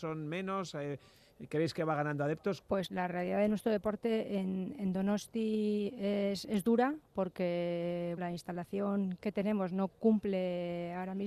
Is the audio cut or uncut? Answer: cut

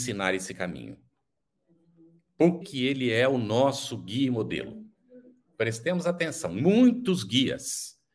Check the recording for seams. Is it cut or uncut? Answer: cut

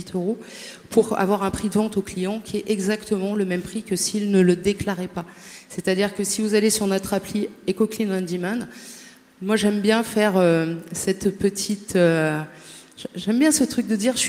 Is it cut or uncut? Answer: uncut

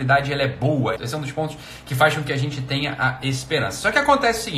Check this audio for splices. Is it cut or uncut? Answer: cut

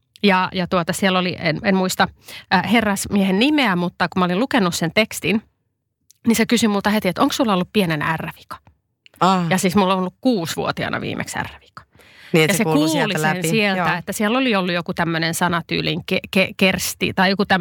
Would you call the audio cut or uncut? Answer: uncut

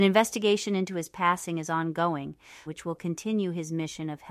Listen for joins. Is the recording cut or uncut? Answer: cut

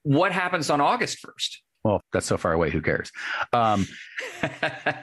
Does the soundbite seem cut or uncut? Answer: cut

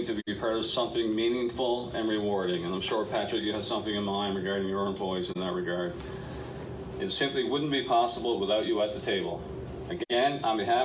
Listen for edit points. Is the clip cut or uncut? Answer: cut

